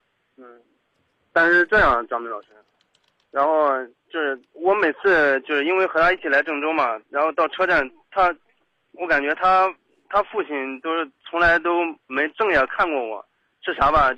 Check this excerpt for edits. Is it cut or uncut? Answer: cut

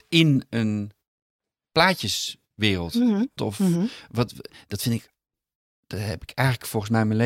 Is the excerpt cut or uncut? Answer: cut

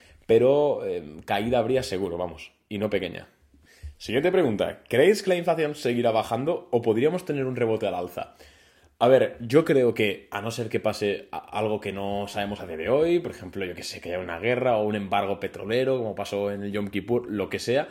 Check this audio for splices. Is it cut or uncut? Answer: uncut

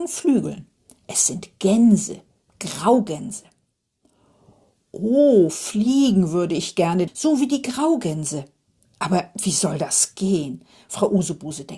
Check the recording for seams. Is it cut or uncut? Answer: cut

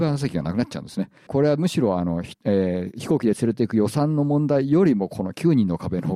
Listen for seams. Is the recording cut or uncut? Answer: cut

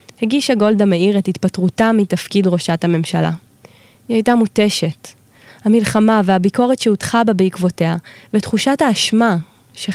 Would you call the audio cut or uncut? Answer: uncut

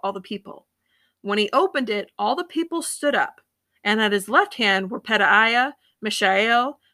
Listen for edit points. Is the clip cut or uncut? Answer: cut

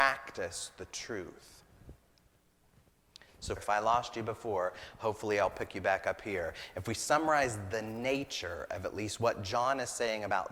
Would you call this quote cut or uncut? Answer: cut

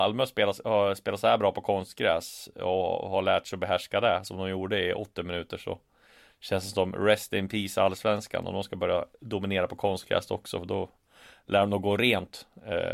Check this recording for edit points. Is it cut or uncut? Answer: uncut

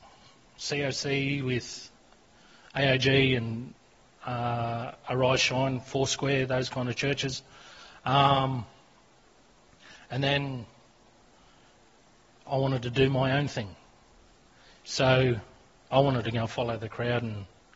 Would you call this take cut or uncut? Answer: uncut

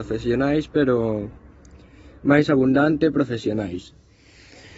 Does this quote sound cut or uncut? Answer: uncut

